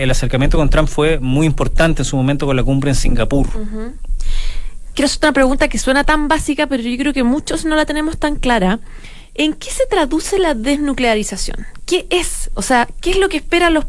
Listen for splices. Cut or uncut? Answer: uncut